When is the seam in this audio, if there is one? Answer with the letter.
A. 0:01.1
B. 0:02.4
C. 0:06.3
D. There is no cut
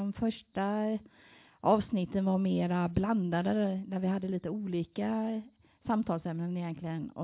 D